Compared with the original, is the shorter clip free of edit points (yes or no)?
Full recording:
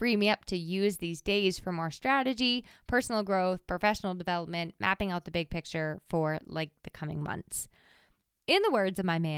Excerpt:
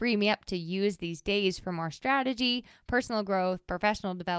yes